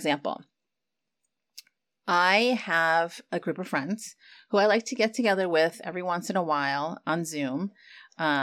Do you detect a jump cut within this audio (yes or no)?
no